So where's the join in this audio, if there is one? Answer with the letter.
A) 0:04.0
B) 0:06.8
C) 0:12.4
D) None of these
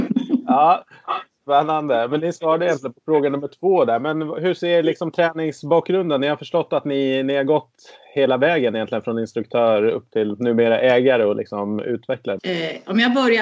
C